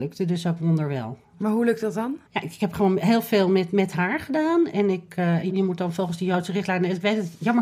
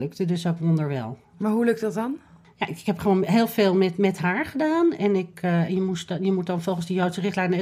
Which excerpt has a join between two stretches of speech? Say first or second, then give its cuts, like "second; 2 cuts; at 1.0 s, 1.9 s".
first; 2 cuts; at 2.3 s, 5.5 s